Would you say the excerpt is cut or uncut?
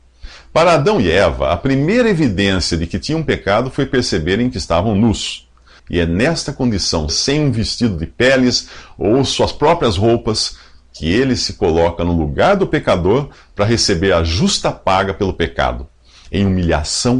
cut